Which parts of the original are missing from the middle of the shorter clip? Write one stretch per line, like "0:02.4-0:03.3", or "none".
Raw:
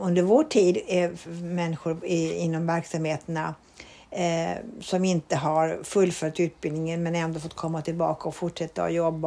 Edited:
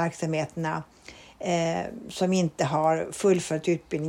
none